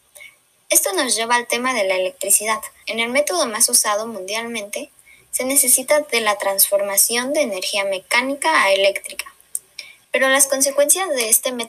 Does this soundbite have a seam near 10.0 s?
yes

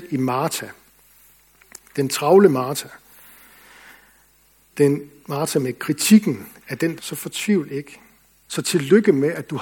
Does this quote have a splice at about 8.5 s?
yes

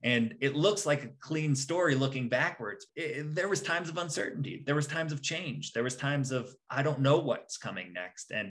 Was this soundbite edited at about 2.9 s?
yes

